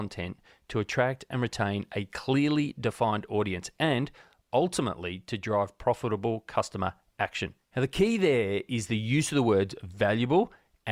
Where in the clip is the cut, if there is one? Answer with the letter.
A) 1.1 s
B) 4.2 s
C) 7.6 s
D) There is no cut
C